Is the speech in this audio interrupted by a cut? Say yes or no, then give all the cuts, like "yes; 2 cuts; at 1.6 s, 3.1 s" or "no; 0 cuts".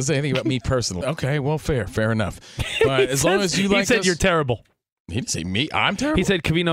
yes; 1 cut; at 1.0 s